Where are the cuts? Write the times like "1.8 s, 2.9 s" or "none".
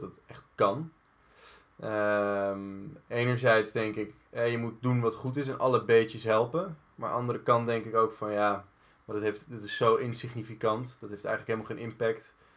none

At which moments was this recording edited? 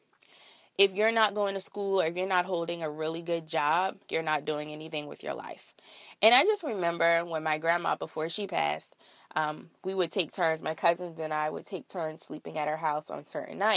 4.1 s

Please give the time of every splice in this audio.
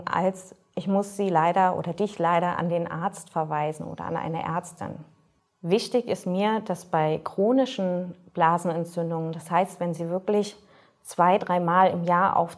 none

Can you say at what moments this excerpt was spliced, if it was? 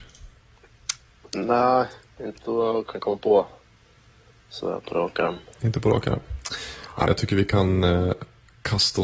7.1 s

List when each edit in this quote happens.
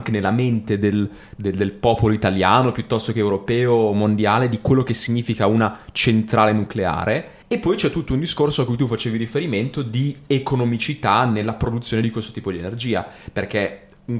7.4 s

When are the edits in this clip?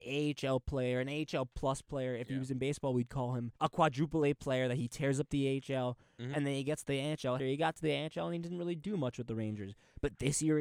3.6 s, 7.4 s

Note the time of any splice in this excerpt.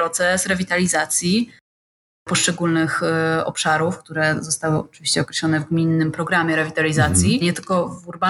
7.4 s

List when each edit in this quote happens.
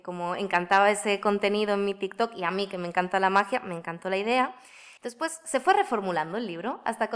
5.0 s

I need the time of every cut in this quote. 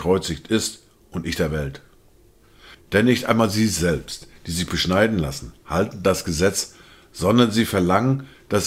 2.7 s

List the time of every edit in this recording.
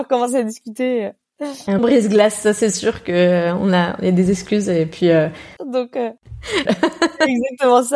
1.8 s, 5.6 s, 6.7 s

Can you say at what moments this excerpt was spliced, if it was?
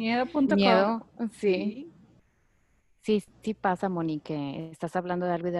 none

